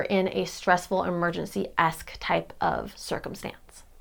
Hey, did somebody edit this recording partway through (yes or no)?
no